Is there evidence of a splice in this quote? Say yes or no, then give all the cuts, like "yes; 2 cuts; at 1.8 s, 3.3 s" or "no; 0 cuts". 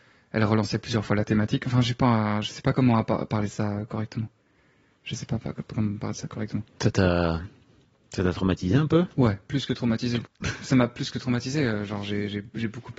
yes; 1 cut; at 10.2 s